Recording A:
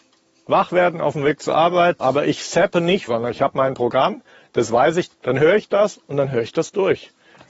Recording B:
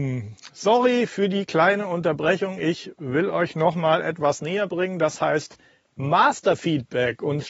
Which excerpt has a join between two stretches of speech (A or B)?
A